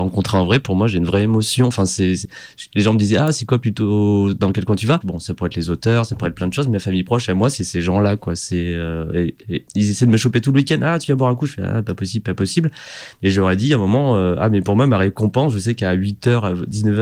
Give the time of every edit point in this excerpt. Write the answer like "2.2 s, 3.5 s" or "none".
5.0 s